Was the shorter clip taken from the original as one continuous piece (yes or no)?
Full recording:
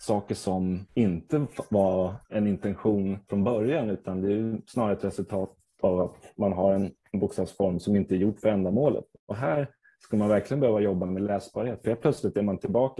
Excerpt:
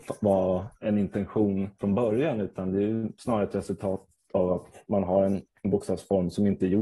yes